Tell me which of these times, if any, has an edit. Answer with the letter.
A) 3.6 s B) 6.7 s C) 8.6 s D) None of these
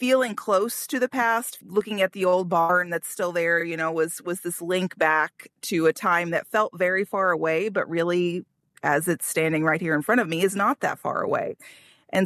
D